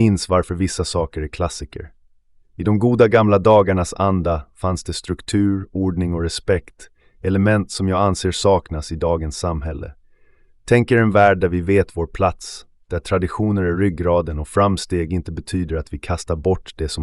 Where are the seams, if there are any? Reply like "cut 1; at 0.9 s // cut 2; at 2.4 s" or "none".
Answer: none